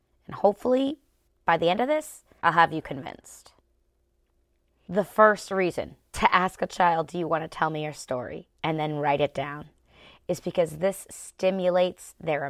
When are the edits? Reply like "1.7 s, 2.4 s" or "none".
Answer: 8.5 s